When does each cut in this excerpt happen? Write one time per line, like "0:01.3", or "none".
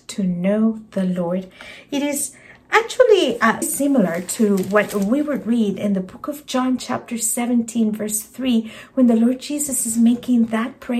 0:03.6